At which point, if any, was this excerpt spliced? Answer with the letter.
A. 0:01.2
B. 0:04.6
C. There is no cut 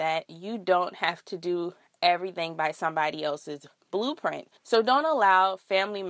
B